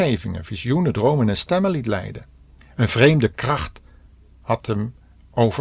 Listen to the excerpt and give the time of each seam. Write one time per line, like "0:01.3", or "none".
0:02.7